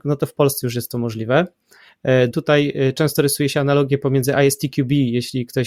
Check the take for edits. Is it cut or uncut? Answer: cut